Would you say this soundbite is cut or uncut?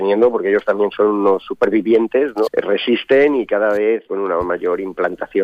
cut